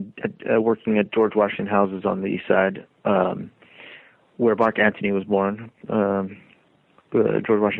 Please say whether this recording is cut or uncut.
uncut